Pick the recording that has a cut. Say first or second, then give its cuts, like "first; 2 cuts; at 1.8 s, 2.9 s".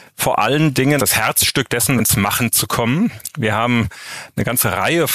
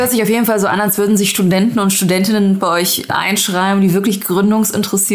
first; 2 cuts; at 1.0 s, 2.0 s